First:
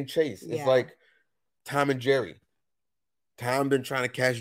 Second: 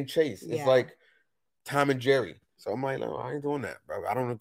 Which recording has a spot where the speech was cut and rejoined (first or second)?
second